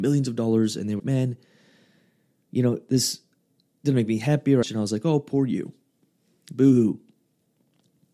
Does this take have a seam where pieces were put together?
yes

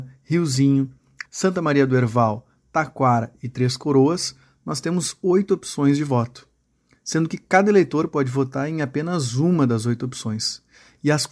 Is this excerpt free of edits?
no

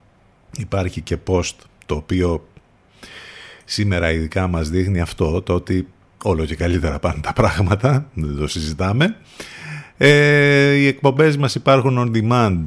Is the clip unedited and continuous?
yes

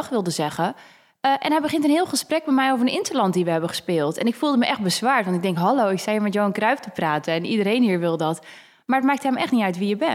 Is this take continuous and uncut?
yes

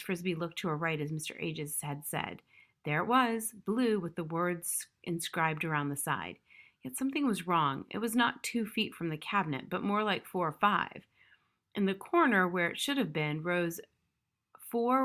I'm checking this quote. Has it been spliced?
no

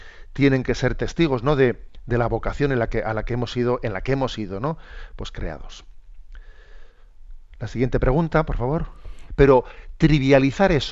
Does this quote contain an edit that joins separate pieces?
yes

